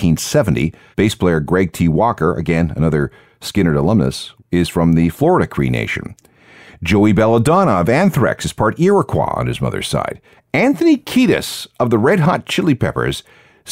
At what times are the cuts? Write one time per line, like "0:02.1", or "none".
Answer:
0:00.9
0:10.4